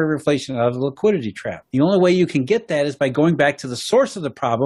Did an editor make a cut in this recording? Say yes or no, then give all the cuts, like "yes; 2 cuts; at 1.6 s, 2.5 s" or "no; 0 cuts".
yes; 1 cut; at 1.7 s